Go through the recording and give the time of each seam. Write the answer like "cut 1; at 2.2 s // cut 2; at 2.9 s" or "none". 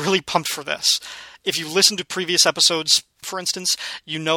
cut 1; at 3.2 s